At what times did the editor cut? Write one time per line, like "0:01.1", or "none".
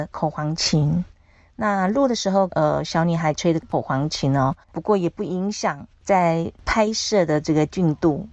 0:02.5
0:04.6